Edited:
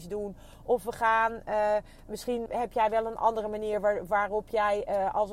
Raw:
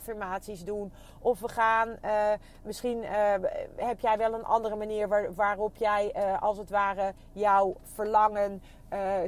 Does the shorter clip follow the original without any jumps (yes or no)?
no